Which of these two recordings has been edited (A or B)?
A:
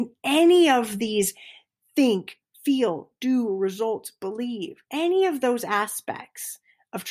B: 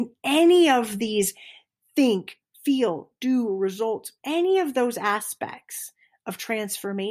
B